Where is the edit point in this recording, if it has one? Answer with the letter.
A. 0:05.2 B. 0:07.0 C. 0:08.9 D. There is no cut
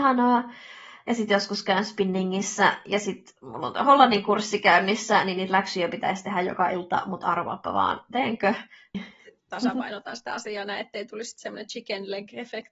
C